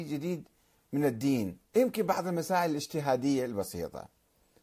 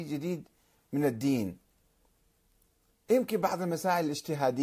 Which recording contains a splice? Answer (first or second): first